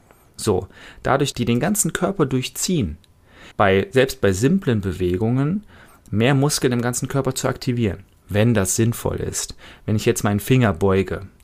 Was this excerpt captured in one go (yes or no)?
no